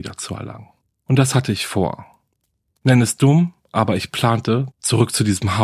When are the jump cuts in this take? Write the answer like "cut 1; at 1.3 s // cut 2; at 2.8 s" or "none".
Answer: cut 1; at 4.7 s